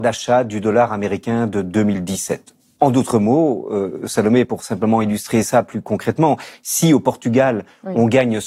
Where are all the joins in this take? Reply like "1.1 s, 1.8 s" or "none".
none

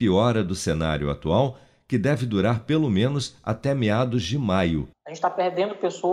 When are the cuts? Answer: 4.9 s

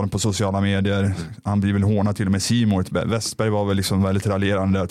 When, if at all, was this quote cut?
none

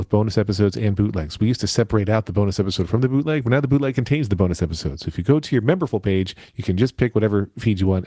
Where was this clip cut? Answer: none

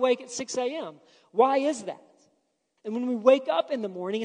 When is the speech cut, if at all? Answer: 2.8 s

